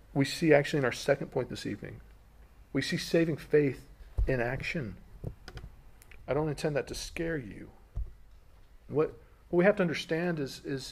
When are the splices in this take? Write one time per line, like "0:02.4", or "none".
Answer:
0:06.2
0:08.9